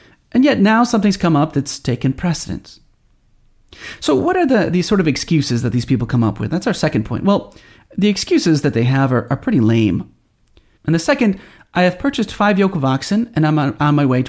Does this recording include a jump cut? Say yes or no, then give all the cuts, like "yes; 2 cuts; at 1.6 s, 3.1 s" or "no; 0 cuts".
yes; 1 cut; at 10.8 s